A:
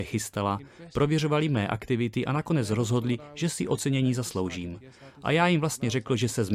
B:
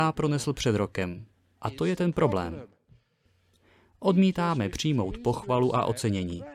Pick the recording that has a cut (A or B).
B